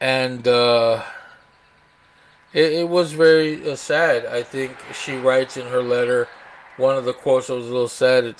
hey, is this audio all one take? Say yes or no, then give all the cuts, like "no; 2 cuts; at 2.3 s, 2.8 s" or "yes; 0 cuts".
yes; 0 cuts